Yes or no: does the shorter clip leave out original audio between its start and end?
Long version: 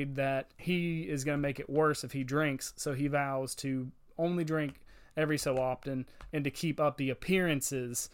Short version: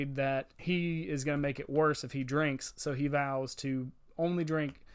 no